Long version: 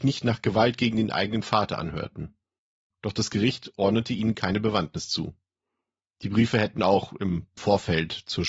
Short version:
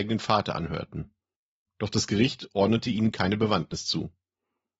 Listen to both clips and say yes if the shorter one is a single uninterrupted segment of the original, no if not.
yes